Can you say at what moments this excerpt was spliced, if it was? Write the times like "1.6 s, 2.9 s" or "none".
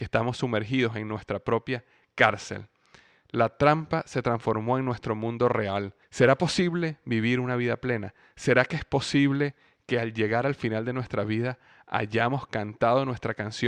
6.0 s